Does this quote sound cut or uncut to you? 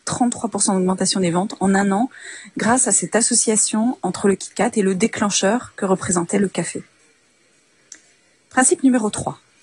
uncut